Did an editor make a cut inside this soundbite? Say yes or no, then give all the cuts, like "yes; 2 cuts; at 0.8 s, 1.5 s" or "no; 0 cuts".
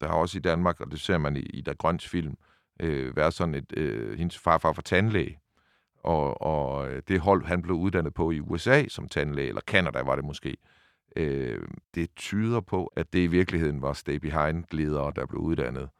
yes; 3 cuts; at 1.4 s, 11.8 s, 12.9 s